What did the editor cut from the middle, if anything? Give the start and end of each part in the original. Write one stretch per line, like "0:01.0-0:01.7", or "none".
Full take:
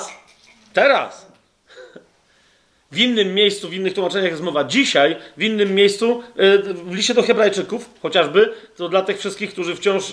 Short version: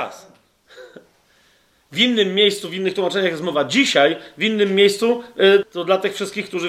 0:06.6-0:08.7